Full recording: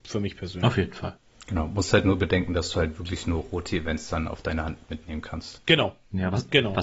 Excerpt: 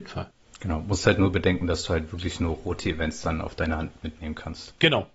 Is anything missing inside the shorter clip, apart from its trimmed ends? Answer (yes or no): no